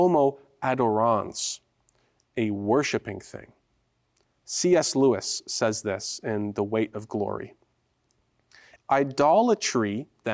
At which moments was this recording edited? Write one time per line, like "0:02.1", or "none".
0:08.8